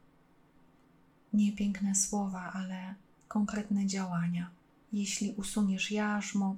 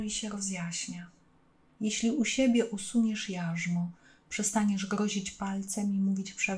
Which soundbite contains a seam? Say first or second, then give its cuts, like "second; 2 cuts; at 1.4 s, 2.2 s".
second; 1 cut; at 1.7 s